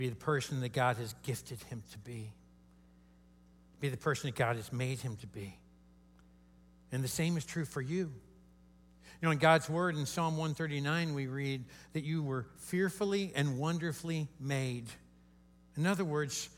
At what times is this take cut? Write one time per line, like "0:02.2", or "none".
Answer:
none